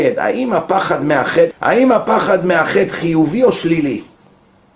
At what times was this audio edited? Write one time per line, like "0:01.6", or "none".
0:01.5